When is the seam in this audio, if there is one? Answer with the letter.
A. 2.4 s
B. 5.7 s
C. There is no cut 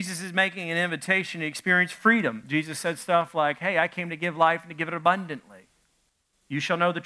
C